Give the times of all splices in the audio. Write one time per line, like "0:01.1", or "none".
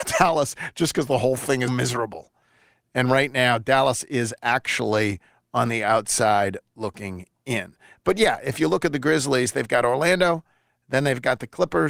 0:01.7